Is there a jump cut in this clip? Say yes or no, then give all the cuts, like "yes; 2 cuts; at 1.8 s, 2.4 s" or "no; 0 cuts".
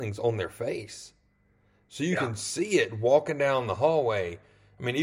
no; 0 cuts